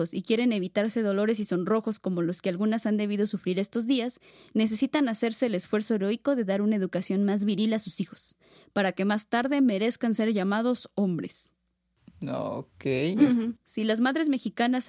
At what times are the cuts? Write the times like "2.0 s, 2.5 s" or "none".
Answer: 13.6 s